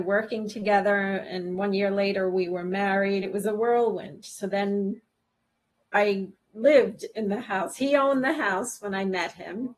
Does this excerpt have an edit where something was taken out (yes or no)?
no